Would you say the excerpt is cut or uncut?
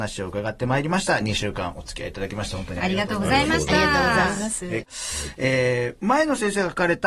cut